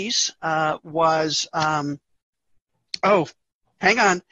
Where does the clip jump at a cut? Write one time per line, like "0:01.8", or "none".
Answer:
none